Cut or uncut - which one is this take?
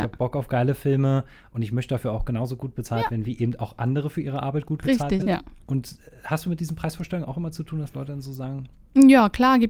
cut